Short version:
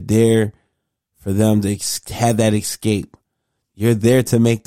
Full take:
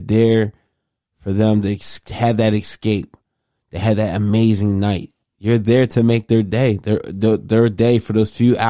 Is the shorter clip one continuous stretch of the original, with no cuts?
no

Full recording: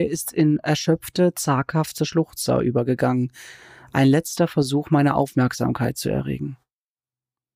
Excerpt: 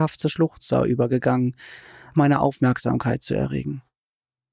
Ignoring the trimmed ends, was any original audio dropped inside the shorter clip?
yes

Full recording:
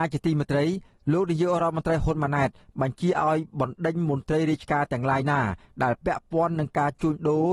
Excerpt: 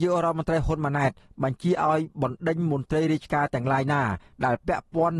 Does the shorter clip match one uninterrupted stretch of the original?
yes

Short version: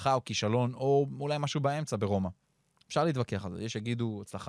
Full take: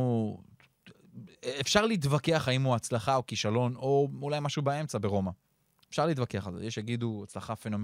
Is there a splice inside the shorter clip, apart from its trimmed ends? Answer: no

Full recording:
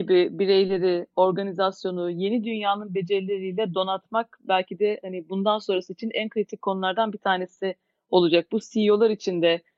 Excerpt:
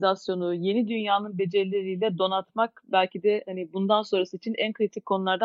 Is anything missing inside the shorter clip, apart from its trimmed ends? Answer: no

